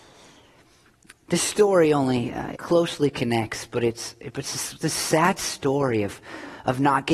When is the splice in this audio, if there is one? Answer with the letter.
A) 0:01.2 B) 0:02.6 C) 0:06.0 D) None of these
B